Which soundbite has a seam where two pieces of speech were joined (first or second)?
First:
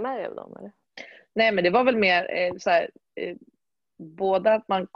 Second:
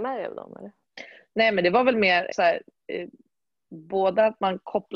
second